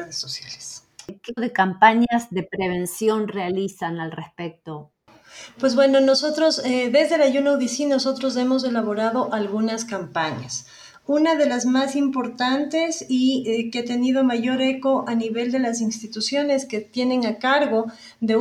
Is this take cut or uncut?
cut